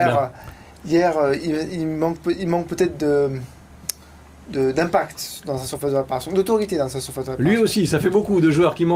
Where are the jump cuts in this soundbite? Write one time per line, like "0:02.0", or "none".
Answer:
none